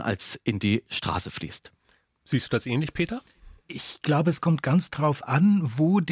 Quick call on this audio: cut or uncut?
cut